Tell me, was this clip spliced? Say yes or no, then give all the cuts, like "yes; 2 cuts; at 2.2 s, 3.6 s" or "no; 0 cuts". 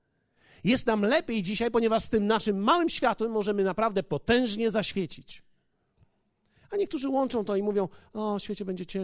no; 0 cuts